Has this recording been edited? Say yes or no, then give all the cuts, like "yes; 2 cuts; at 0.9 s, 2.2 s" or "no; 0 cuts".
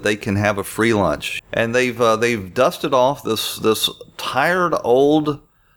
yes; 1 cut; at 1.4 s